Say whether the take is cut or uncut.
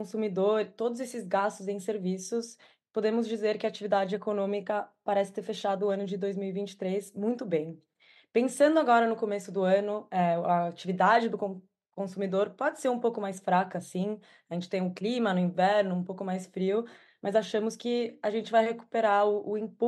uncut